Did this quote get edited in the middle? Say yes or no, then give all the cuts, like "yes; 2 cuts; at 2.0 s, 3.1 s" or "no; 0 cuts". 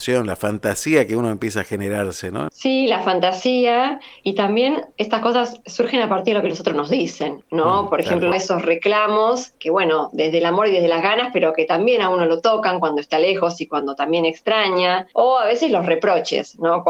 yes; 3 cuts; at 2.5 s, 8.3 s, 9.6 s